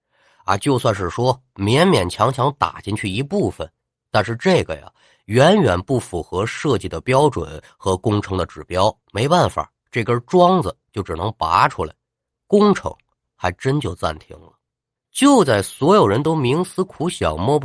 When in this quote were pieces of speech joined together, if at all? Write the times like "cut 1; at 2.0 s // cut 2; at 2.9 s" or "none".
cut 1; at 9.0 s // cut 2; at 15.0 s